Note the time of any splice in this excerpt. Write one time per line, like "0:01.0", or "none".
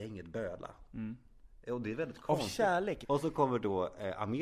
0:03.0